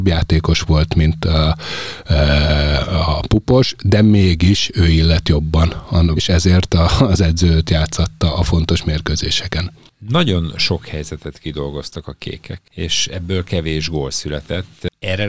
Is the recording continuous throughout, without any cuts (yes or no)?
no